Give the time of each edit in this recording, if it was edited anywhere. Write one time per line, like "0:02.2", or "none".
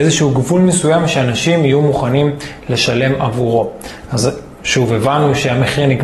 none